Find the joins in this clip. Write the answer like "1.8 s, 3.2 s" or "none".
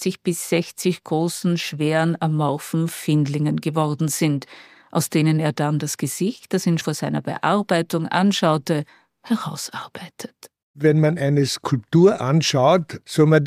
6.8 s